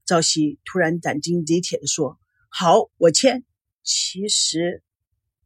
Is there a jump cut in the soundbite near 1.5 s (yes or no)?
no